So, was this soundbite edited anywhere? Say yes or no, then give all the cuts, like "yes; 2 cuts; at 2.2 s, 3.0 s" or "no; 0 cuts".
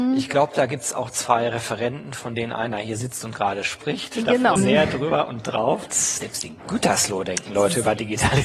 yes; 2 cuts; at 4.6 s, 5.9 s